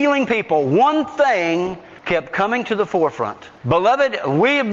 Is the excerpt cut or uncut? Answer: cut